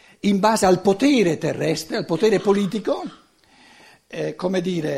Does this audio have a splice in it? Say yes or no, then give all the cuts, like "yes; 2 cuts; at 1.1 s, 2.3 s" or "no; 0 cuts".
no; 0 cuts